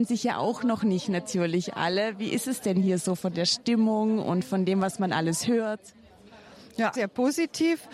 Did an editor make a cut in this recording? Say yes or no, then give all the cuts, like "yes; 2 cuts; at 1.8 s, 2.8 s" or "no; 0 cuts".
yes; 1 cut; at 6.9 s